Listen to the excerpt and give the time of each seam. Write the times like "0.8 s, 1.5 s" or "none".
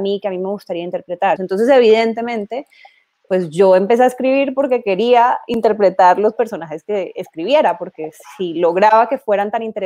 1.4 s